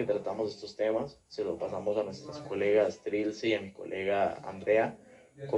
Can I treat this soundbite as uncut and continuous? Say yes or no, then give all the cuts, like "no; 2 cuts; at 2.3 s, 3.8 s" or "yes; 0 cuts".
yes; 0 cuts